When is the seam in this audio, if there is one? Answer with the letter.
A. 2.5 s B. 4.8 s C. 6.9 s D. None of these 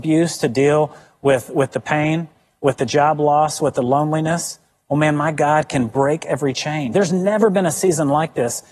C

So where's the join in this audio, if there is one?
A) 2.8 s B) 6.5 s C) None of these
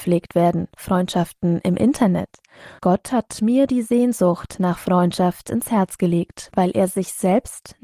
A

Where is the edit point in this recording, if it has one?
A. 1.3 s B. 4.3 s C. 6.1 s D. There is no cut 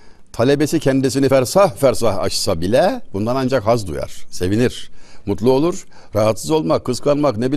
D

